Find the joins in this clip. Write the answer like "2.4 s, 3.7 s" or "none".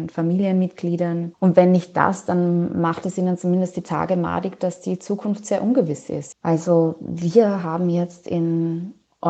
6.3 s